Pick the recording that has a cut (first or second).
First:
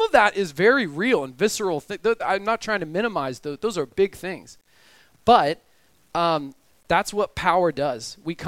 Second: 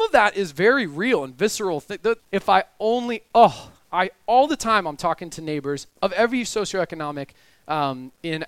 second